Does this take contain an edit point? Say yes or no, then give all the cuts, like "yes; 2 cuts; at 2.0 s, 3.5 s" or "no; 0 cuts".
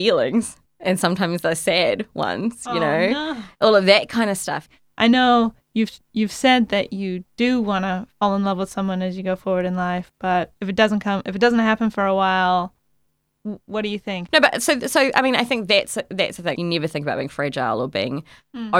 yes; 2 cuts; at 14.3 s, 16.6 s